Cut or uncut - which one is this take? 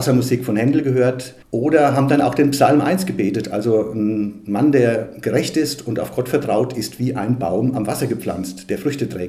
cut